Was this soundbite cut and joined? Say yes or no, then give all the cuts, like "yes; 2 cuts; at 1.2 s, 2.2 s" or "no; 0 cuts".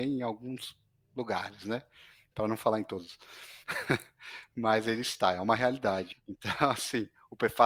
yes; 1 cut; at 6.1 s